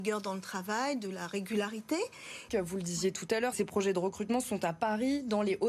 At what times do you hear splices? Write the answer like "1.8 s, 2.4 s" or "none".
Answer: 2.5 s, 3.5 s